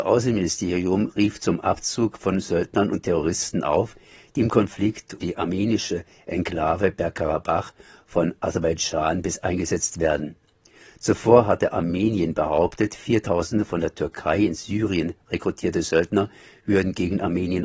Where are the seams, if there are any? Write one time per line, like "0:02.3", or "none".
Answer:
0:05.2